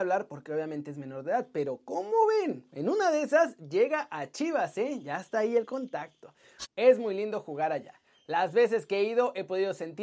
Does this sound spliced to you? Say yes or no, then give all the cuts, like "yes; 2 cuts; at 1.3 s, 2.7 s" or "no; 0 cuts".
yes; 1 cut; at 6.6 s